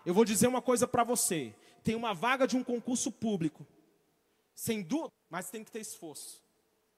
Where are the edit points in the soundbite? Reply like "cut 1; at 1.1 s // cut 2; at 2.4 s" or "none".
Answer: cut 1; at 5.1 s